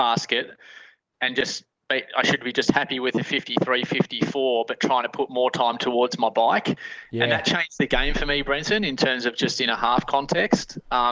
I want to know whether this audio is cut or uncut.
uncut